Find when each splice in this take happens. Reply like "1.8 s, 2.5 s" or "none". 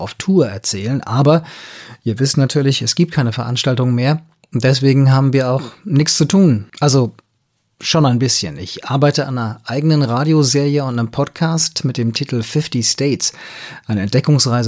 6.7 s